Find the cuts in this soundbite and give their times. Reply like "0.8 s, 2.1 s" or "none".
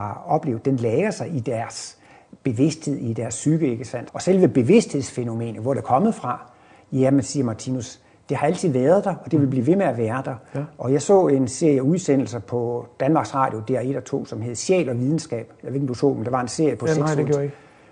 4.1 s